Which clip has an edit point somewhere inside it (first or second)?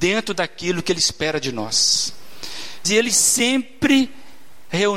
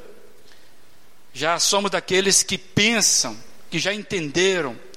first